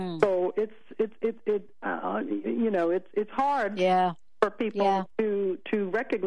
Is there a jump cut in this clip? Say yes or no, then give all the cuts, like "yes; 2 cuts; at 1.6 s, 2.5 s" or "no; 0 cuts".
no; 0 cuts